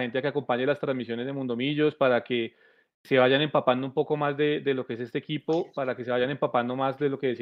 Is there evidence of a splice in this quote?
no; 0 cuts

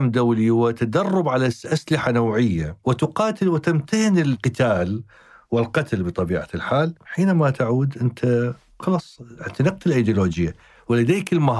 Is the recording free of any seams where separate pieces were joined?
no; 1 cut; at 7.0 s

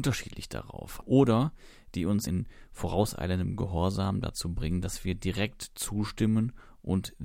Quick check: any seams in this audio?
yes; 2 cuts; at 1.0 s, 2.3 s

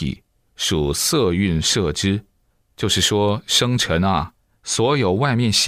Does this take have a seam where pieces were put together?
no; 0 cuts

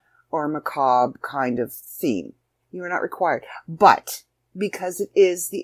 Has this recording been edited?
yes; 1 cut; at 2.6 s

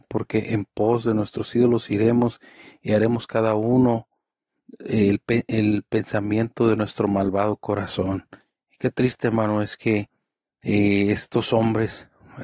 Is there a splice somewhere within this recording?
no; 0 cuts

